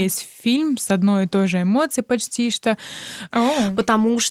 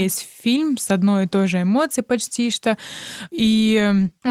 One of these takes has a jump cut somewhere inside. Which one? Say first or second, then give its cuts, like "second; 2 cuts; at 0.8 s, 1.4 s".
first; 1 cut; at 3.3 s